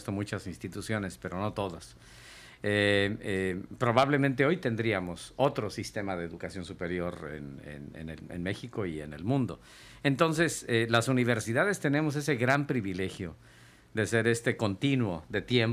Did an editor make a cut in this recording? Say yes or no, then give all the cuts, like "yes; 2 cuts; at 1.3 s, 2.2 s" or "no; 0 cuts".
no; 0 cuts